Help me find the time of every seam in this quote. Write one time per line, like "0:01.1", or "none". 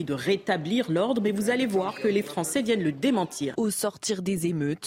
0:03.5

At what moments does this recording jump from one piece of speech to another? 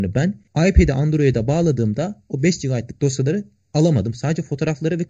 none

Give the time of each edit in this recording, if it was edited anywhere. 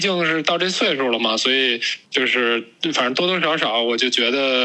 0:02.1

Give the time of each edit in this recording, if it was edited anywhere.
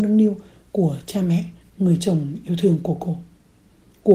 0:01.6

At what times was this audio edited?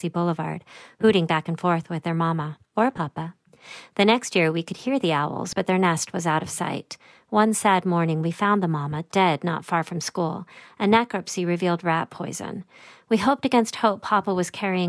none

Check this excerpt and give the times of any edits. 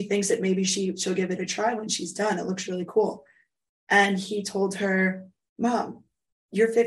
none

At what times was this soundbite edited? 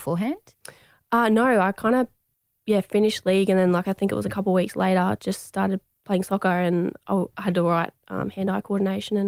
none

